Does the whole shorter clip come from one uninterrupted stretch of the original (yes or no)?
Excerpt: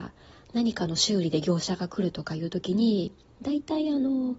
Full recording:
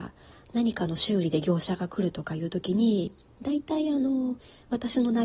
yes